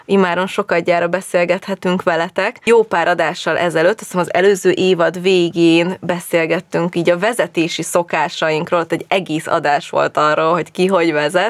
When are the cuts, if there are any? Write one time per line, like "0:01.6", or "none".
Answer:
none